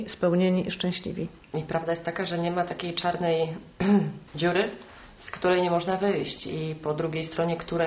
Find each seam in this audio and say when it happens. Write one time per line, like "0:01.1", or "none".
0:04.3